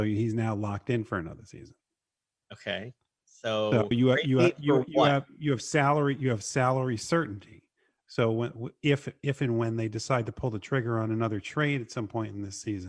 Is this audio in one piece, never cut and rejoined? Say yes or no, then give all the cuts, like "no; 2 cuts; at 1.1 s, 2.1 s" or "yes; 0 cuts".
no; 1 cut; at 3.9 s